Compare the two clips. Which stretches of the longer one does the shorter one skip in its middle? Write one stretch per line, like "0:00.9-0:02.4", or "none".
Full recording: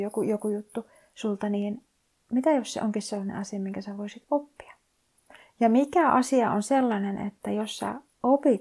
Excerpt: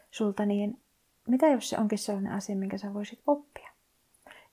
none